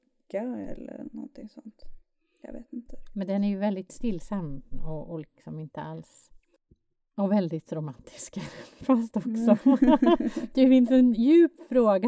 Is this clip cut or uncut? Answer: cut